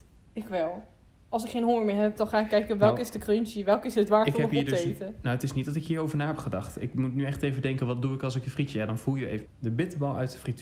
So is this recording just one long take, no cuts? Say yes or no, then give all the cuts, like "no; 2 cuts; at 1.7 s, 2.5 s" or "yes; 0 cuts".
no; 1 cut; at 9.5 s